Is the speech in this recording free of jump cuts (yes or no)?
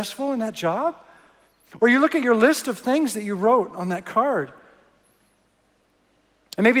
yes